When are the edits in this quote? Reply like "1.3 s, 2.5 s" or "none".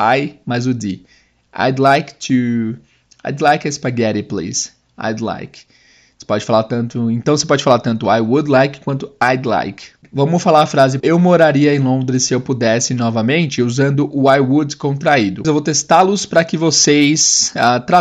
11.0 s, 15.4 s